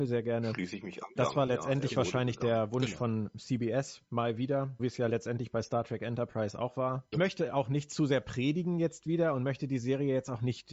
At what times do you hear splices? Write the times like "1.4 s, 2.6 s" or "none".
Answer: 1.2 s, 4.8 s, 7.1 s